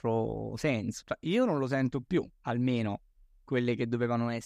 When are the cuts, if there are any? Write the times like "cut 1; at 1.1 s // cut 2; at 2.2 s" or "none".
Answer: cut 1; at 1.0 s